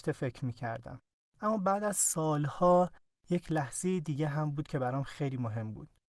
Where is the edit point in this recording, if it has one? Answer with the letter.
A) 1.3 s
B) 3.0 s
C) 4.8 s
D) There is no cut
A